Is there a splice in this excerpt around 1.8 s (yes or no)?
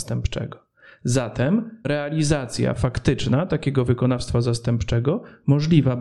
yes